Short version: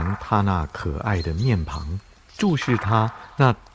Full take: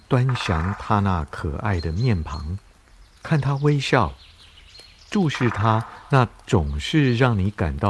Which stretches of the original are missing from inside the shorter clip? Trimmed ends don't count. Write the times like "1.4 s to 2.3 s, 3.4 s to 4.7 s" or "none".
2.9 s to 5.0 s